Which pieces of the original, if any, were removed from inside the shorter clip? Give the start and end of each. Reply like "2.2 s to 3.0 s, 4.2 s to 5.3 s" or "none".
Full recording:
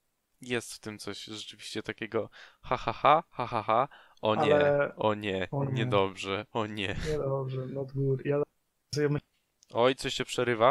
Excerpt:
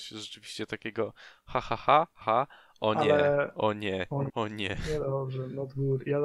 3.4 s to 3.6 s, 5.7 s to 6.5 s